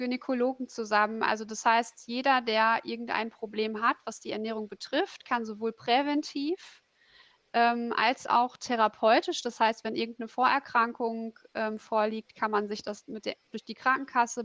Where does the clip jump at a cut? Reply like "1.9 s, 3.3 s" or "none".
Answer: none